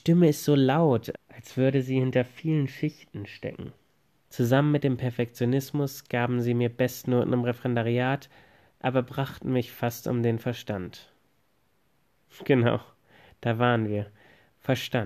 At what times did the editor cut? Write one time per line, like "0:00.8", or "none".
0:01.1
0:04.2